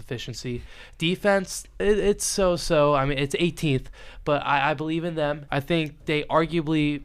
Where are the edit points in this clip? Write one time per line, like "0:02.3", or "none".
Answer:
0:01.8
0:05.5